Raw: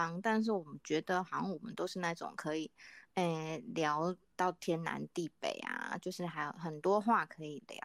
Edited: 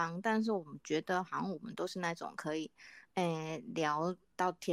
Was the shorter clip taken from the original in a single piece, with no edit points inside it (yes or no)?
yes